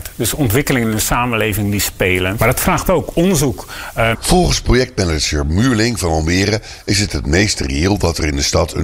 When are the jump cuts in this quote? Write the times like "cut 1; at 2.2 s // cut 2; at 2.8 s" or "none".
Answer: cut 1; at 2.4 s // cut 2; at 4.1 s